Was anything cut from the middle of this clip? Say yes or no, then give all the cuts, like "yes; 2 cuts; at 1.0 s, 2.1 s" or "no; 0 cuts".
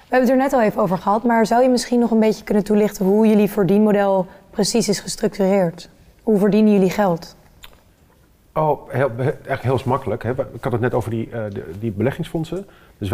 no; 0 cuts